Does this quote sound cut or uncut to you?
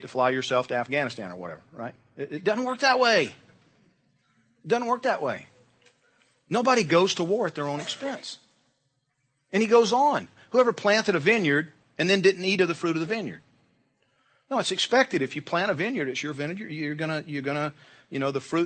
uncut